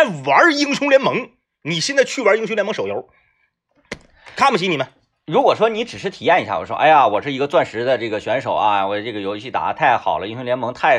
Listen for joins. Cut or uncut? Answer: uncut